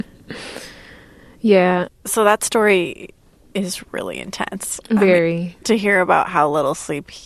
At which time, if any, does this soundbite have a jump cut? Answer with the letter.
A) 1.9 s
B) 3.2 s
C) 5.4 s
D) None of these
A